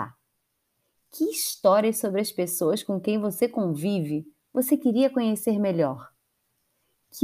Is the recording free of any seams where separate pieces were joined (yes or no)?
yes